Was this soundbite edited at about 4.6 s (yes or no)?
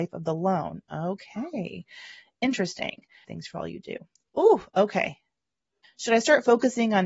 no